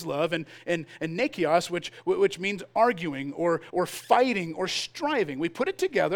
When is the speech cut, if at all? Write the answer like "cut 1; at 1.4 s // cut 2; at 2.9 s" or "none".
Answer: cut 1; at 3.7 s